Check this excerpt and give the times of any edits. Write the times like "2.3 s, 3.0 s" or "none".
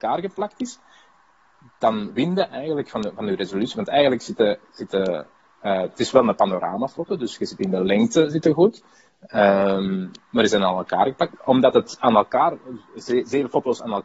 11.3 s